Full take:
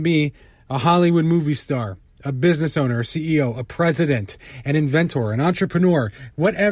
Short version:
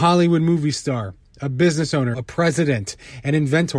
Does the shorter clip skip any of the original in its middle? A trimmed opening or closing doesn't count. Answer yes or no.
yes